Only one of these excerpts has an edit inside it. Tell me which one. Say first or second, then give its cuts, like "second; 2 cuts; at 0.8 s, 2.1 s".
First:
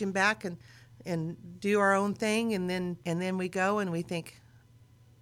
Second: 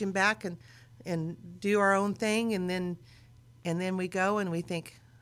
first; 1 cut; at 3.0 s